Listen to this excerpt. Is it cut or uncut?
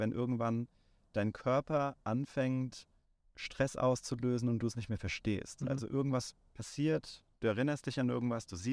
uncut